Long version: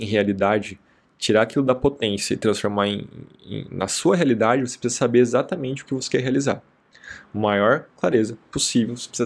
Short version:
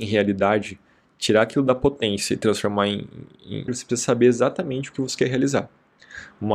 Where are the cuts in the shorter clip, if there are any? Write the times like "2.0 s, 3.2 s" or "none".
3.7 s

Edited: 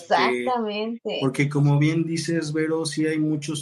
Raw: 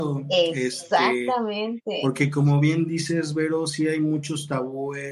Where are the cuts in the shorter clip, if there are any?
none

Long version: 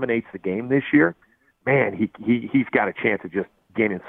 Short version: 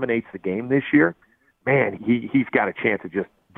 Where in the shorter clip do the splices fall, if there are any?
2.0 s

